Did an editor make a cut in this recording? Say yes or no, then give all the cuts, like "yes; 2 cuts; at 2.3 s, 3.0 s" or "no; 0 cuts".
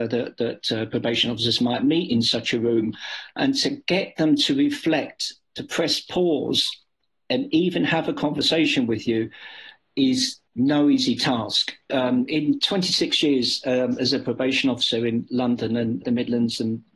yes; 2 cuts; at 11.9 s, 16.0 s